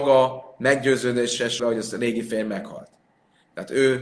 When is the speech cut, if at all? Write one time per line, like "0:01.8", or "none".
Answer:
0:01.6